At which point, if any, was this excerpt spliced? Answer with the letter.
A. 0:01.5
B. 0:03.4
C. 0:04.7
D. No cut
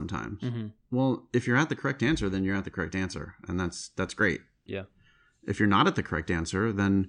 C